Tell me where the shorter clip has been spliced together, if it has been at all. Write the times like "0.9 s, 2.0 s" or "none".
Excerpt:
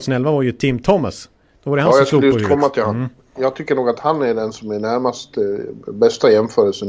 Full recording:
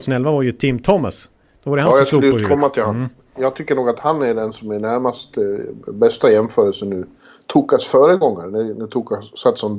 none